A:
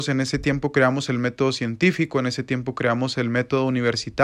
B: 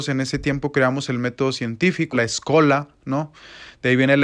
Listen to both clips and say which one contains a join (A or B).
B